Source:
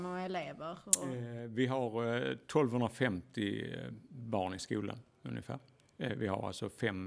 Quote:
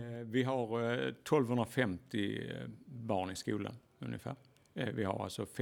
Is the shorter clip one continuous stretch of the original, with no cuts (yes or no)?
yes